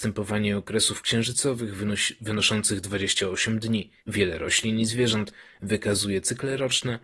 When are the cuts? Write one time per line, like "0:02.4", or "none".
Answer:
0:04.0